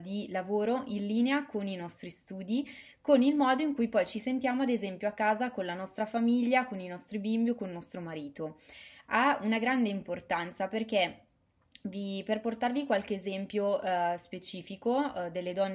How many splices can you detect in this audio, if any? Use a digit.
0